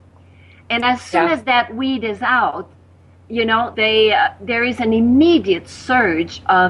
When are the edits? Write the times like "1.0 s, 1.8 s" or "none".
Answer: 3.7 s